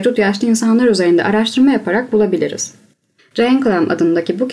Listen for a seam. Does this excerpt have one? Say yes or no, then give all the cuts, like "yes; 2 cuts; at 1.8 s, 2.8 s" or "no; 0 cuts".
yes; 1 cut; at 3.2 s